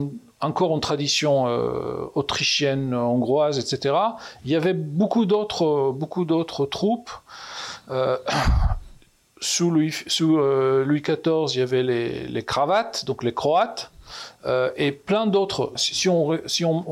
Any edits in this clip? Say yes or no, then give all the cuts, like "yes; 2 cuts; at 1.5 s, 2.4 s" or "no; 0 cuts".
yes; 1 cut; at 15.8 s